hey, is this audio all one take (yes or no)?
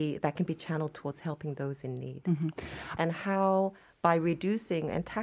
no